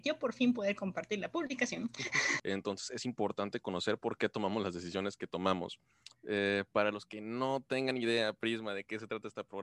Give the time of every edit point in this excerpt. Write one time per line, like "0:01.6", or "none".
0:02.4

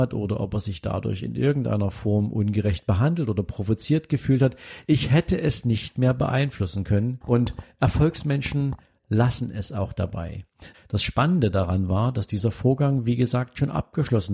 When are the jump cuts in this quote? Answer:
0:07.2
0:10.7

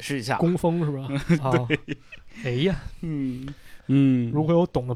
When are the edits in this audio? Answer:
0:01.4
0:03.8

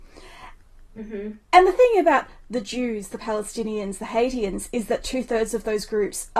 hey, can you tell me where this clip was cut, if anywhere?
none

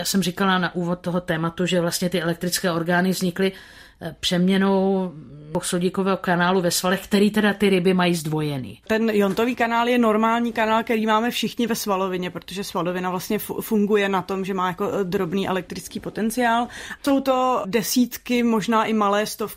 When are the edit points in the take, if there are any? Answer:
0:08.8
0:17.0

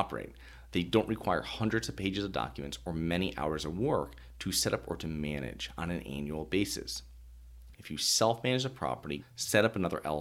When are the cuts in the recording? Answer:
0:07.7
0:09.2

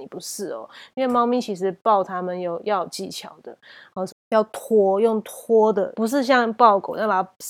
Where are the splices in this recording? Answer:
0:04.1
0:05.9

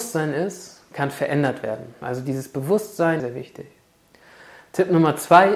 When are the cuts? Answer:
0:02.0
0:03.2

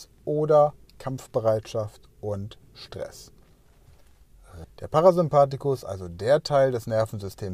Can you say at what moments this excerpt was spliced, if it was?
0:04.6

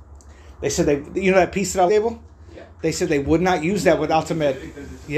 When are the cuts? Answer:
0:01.9

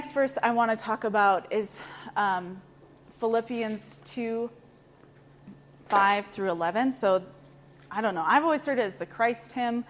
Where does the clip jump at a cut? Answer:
none

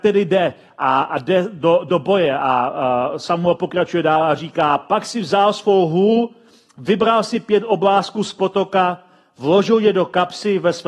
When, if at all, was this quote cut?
none

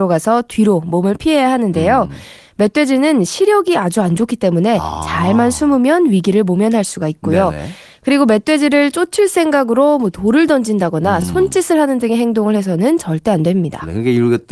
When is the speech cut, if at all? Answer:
none

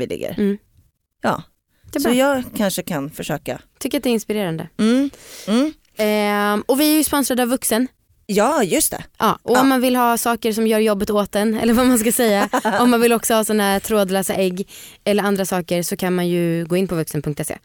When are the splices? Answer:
none

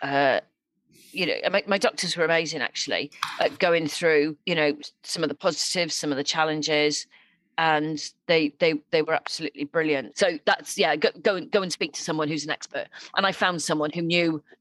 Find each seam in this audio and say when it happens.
0:04.4
0:10.1

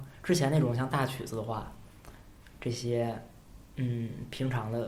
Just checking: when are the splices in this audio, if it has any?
0:03.7

